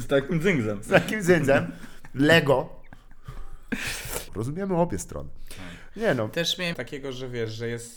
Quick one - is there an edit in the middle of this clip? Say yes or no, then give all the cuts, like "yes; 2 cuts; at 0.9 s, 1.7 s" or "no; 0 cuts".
yes; 2 cuts; at 4.3 s, 6.7 s